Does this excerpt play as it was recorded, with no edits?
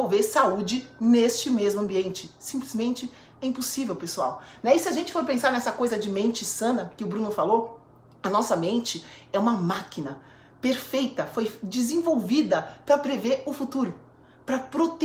yes; 0 cuts

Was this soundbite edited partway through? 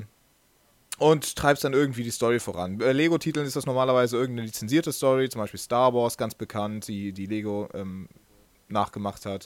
no; 0 cuts

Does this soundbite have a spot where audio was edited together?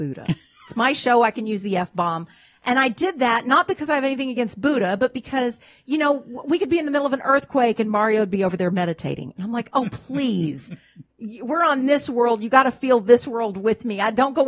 no; 0 cuts

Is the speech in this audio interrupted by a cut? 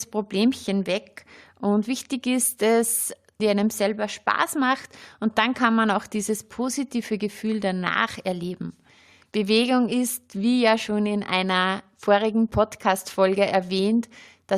yes; 1 cut; at 3.4 s

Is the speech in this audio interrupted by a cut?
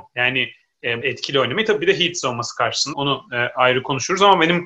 yes; 2 cuts; at 1.0 s, 2.9 s

